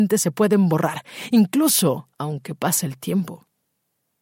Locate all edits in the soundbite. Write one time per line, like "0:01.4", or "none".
0:02.1